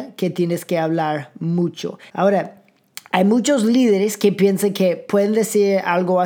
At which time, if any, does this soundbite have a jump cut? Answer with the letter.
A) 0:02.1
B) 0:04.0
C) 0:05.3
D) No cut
A